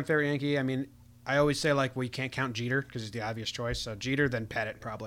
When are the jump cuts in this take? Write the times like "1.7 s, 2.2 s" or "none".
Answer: none